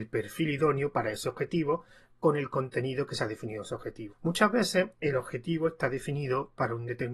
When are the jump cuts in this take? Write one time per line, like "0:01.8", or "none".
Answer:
0:04.1